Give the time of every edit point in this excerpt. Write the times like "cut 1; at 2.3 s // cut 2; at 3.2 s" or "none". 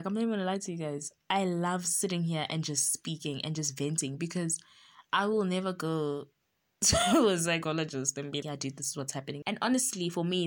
cut 1; at 8.4 s // cut 2; at 9.4 s